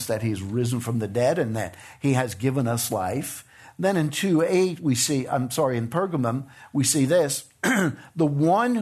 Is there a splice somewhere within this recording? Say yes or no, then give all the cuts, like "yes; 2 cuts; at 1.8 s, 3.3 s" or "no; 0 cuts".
no; 0 cuts